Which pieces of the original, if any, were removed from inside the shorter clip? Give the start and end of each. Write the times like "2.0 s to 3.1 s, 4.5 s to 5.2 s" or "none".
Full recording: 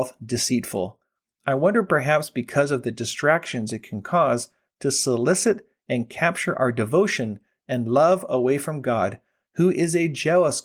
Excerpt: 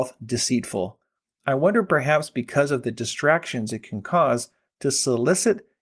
none

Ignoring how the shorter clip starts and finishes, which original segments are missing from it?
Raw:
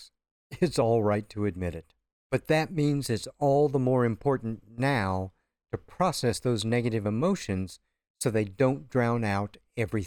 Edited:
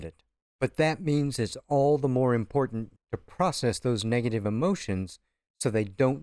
4.7 s to 5.6 s

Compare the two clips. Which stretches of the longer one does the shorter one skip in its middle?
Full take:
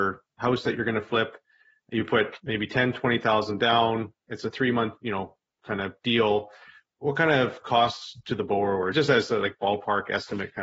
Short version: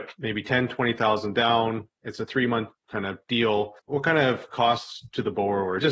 5.0 s to 5.5 s, 6.5 s to 6.9 s

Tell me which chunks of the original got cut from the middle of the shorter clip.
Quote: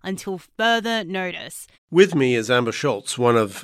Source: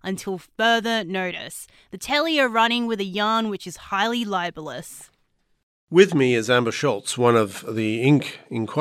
1.7 s to 5.7 s

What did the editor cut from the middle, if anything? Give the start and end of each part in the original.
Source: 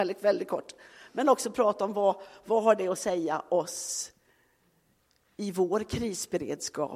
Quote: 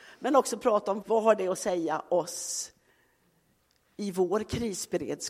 1.9 s to 2.4 s

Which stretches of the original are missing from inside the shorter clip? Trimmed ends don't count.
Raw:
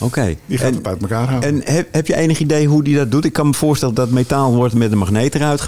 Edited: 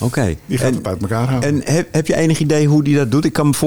none

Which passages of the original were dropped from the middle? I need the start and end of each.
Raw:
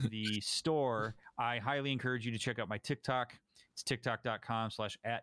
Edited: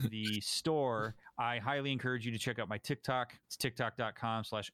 3.4 s to 3.7 s

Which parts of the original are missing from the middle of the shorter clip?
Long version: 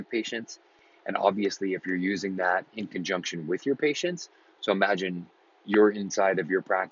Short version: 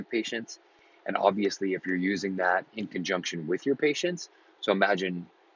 none

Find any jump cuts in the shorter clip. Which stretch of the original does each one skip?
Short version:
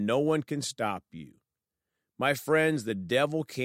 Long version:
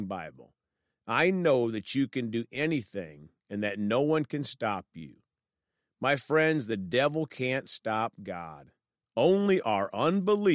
none

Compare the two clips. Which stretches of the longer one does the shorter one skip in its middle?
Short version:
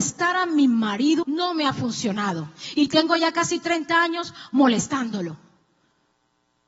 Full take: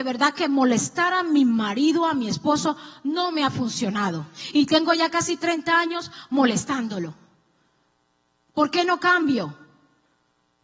2.0 s to 3.0 s

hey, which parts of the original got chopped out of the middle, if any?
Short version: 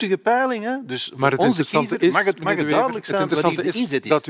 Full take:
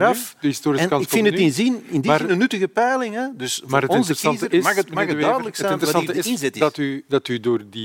none

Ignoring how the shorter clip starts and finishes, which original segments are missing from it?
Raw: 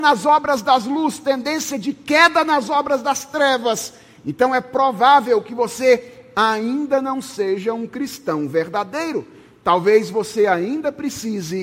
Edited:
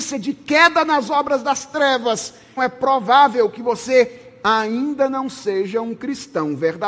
4.2 s to 4.5 s

